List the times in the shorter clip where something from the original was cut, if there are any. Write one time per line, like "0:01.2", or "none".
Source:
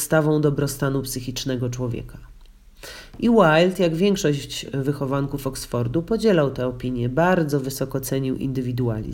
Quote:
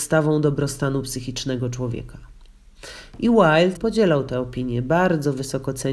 0:03.8